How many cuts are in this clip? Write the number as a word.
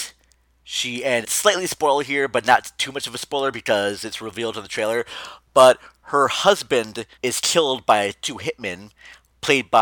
two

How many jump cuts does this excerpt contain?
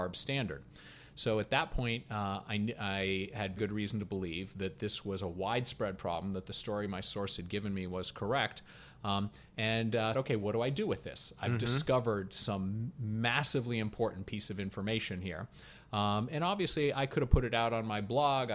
two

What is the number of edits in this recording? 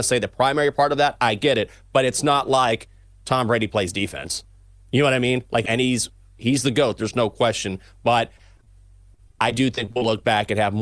one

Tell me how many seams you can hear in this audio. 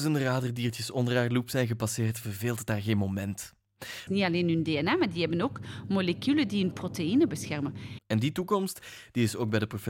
two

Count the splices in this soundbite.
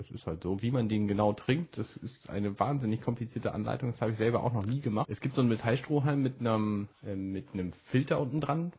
two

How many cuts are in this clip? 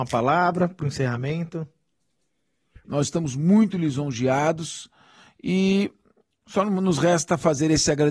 one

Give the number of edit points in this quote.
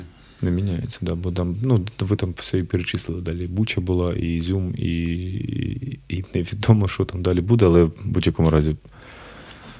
zero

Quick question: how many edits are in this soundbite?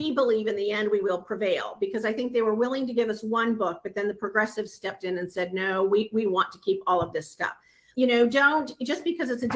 one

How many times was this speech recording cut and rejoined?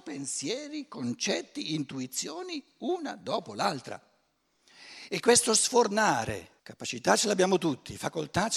one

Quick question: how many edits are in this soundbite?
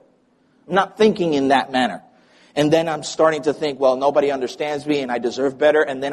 zero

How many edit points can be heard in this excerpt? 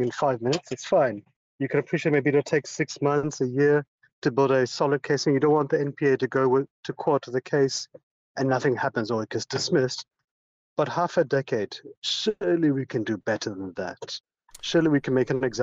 zero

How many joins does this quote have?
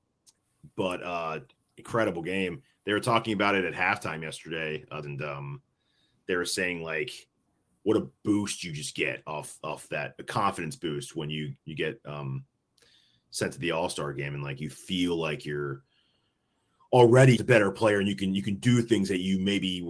two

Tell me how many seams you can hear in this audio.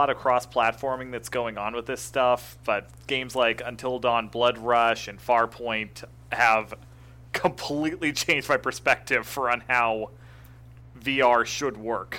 zero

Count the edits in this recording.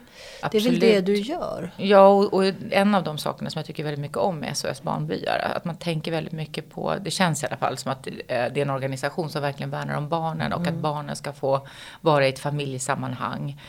one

